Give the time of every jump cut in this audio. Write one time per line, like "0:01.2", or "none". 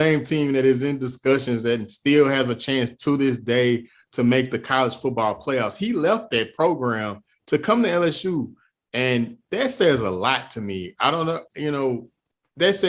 none

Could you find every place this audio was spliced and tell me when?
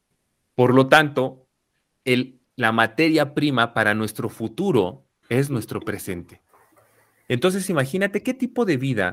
0:02.4

